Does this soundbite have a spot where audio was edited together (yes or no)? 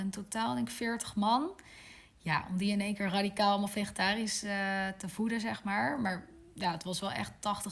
no